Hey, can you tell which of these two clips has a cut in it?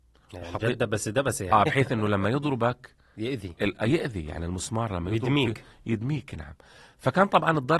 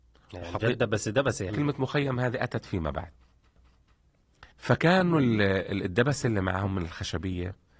second; 2 cuts; at 1.5 s, 4.5 s

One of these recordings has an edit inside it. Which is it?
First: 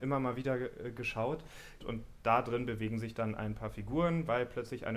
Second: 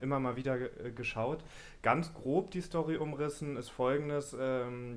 first; 1 cut; at 1.8 s

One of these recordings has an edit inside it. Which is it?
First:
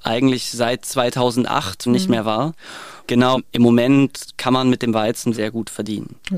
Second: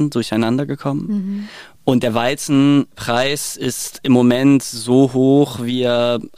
first; 3 cuts; at 1.9 s, 3.0 s, 5.3 s

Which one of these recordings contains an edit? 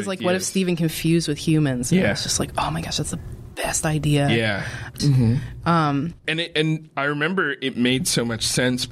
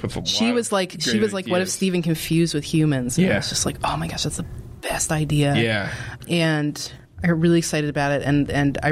first; 1 cut; at 5.0 s

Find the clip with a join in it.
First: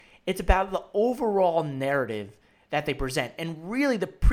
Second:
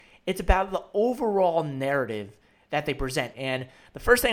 second; 1 cut; at 3.3 s

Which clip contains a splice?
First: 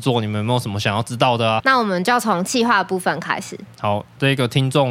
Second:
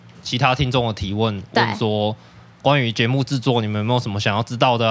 first; 1 cut; at 1.6 s

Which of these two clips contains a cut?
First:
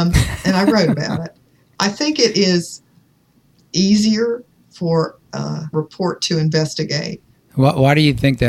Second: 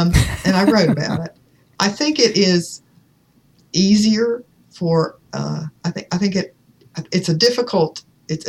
first; 2 cuts; at 5.7 s, 7.3 s

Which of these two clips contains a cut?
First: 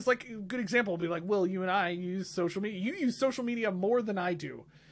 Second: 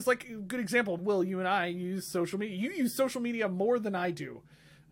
second; 1 cut; at 1.0 s

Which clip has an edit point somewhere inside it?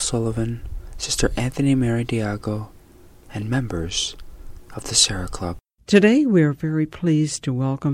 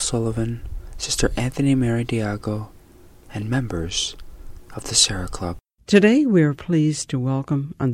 second; 1 cut; at 6.5 s

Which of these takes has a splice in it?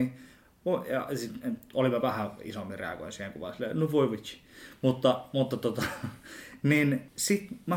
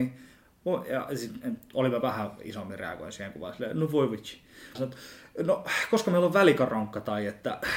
second; 1 cut; at 4.7 s

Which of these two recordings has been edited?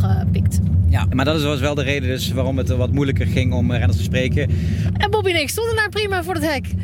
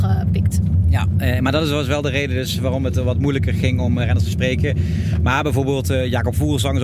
first; 2 cuts; at 1.1 s, 4.9 s

